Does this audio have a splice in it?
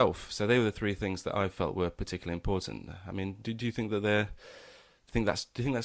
no; 0 cuts

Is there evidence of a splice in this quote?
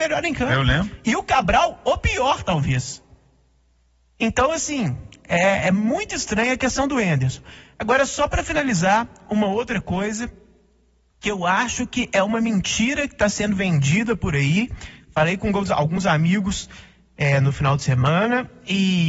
no; 0 cuts

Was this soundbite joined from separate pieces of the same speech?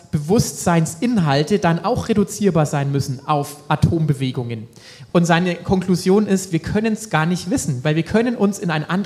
yes; 1 cut; at 5.1 s

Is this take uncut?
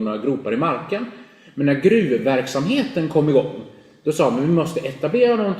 yes; 0 cuts

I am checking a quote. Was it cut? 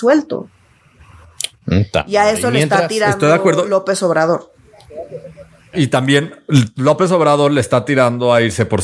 yes; 2 cuts; at 1.5 s, 5.7 s

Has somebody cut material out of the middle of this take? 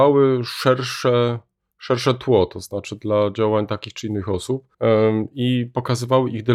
yes; 1 cut; at 4.7 s

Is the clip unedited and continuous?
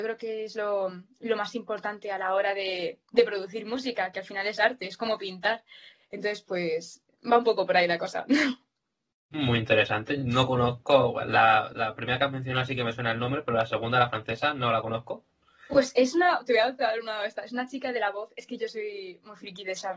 yes; 0 cuts

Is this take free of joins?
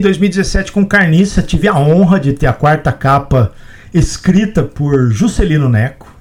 yes; 0 cuts

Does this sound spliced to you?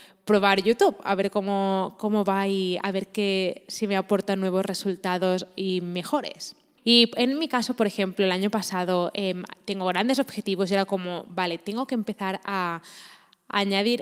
yes; 1 cut; at 6.8 s

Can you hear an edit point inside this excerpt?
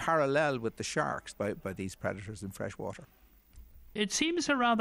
yes; 1 cut; at 1.3 s

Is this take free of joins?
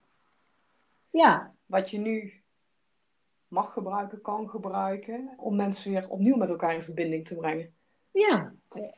no; 2 cuts; at 1.1 s, 5.4 s

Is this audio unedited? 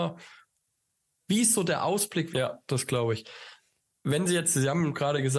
no; 2 cuts; at 1.2 s, 2.3 s

